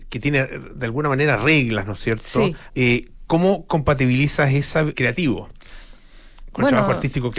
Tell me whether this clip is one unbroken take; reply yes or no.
no